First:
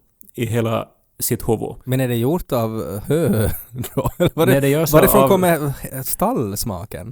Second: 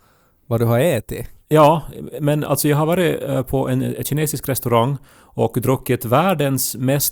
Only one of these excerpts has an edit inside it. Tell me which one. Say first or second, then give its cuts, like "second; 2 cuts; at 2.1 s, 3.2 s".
first; 1 cut; at 3.0 s